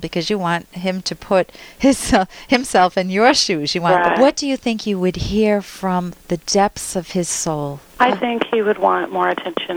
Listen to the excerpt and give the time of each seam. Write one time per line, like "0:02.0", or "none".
0:04.2
0:07.9